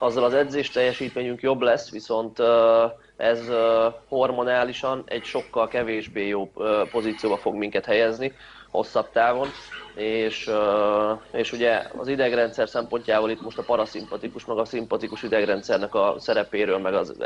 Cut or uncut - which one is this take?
uncut